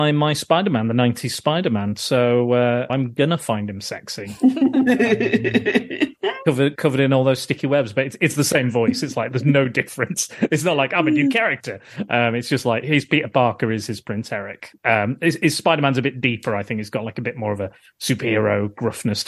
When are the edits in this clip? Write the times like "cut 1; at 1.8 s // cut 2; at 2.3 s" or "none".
cut 1; at 2.9 s